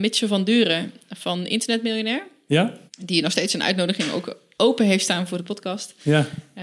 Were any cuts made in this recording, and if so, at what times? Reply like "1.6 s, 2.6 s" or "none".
2.9 s